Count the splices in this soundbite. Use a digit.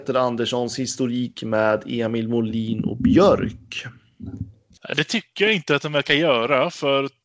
0